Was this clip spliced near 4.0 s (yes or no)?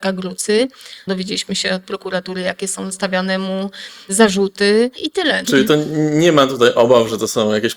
no